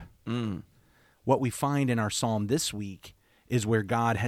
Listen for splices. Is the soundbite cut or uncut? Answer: uncut